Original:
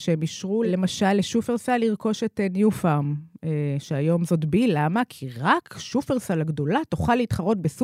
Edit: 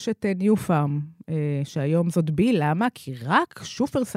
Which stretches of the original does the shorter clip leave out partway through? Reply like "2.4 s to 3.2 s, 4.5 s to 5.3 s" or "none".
none